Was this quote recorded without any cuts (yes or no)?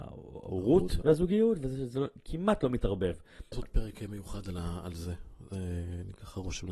no